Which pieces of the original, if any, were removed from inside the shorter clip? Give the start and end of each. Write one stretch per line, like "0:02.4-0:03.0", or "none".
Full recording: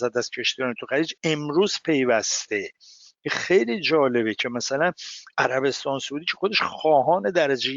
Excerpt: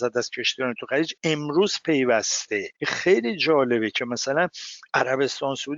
0:02.8-0:03.2